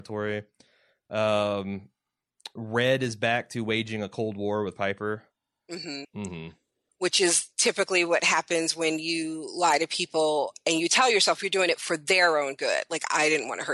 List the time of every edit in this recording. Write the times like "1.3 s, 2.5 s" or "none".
6.0 s